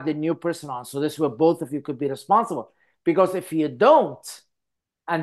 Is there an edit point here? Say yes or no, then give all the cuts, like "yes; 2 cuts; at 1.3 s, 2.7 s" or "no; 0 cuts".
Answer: no; 0 cuts